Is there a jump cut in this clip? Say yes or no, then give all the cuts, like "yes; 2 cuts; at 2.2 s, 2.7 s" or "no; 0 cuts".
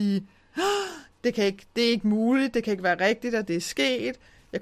yes; 1 cut; at 1.1 s